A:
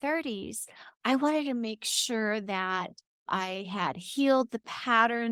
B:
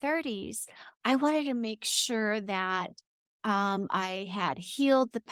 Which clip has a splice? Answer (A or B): A